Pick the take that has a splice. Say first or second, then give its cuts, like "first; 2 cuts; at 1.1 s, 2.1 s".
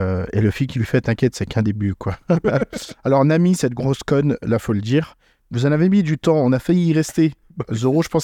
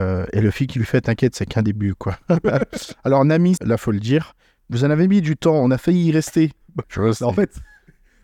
second; 2 cuts; at 3.6 s, 6.8 s